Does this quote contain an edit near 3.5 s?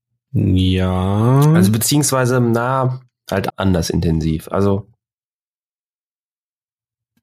yes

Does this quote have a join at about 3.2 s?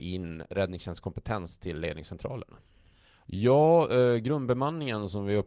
yes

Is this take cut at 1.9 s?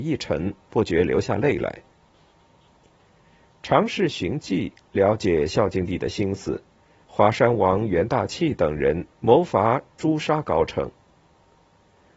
no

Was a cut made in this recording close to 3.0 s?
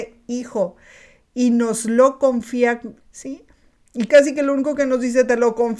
yes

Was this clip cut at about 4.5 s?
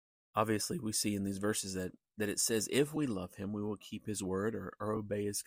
no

